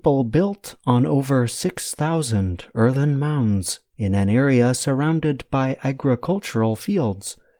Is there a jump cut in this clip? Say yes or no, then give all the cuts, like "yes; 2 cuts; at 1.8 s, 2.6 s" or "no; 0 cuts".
no; 0 cuts